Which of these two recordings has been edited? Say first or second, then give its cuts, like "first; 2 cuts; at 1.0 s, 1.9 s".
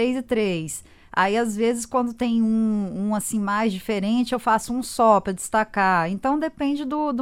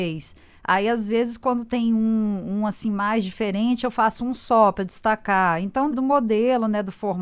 second; 1 cut; at 5.9 s